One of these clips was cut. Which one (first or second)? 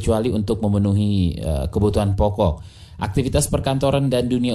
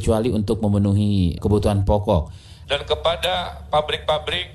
second